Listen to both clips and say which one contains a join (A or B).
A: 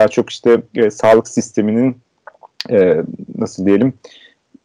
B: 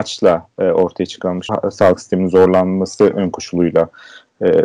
B